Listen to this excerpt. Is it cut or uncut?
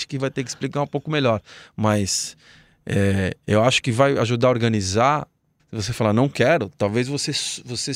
cut